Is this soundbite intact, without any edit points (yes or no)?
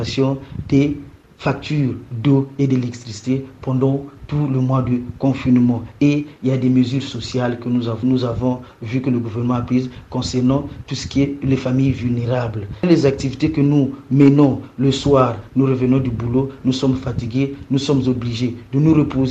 no